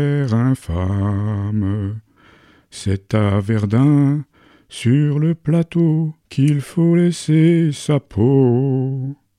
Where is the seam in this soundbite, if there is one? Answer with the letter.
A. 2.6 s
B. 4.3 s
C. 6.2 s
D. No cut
C